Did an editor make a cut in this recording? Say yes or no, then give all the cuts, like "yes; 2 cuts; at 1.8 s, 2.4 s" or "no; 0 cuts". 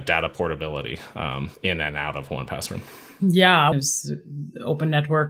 yes; 1 cut; at 3.7 s